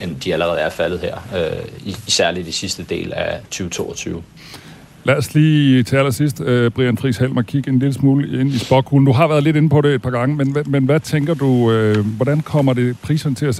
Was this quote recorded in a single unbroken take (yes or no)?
yes